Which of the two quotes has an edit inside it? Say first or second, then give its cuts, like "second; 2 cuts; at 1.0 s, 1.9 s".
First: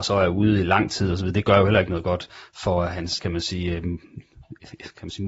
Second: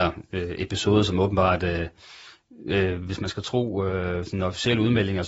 first; 1 cut; at 3.2 s